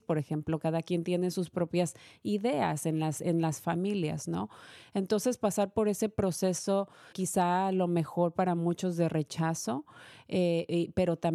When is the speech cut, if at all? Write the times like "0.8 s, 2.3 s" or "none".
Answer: 7.1 s

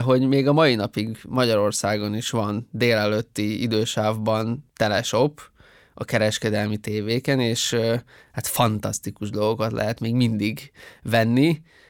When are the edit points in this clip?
none

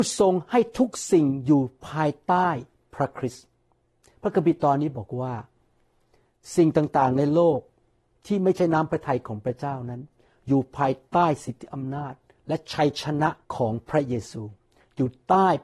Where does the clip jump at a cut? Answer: 13.4 s

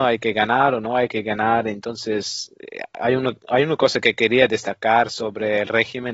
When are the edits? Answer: none

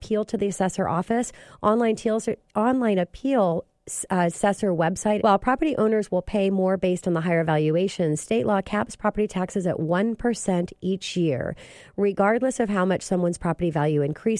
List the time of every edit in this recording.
5.2 s

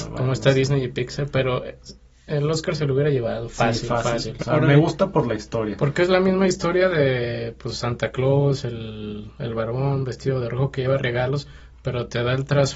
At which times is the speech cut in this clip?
4.4 s

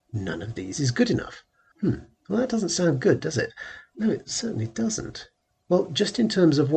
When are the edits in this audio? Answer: 1.7 s, 5.6 s

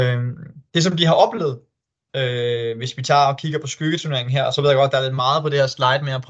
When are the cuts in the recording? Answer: none

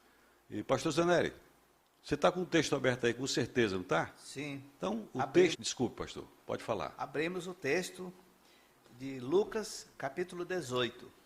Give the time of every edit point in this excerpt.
5.5 s

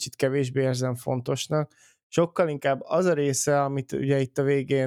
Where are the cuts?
none

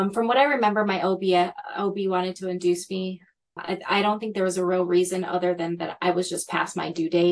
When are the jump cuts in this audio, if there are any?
3.6 s

